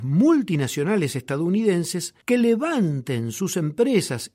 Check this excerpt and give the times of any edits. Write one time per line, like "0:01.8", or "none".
0:02.2